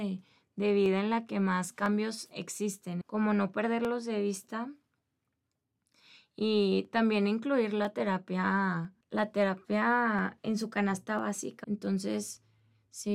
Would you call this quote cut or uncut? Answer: cut